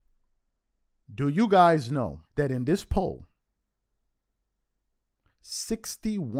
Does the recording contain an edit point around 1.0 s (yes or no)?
yes